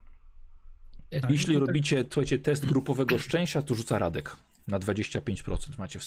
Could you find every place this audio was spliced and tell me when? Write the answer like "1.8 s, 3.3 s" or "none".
1.2 s